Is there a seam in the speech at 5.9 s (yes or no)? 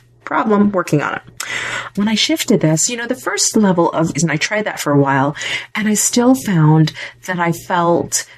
no